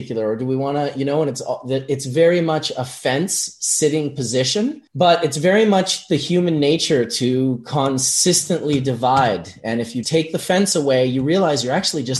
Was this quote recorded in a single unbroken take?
no; 2 cuts; at 4.9 s, 10.0 s

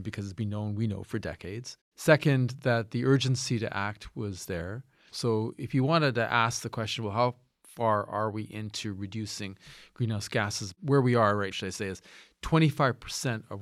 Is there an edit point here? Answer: yes; 2 cuts; at 5.1 s, 11.5 s

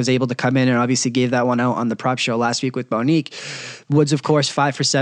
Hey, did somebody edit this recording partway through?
yes; 1 cut; at 3.9 s

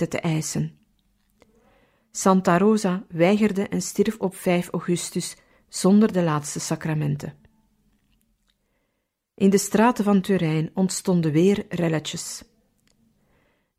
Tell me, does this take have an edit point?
no; 0 cuts

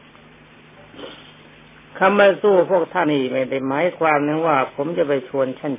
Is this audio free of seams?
no; 1 cut; at 3.1 s

